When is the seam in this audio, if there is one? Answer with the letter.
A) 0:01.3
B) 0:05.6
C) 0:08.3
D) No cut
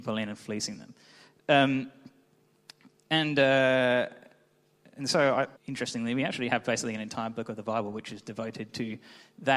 B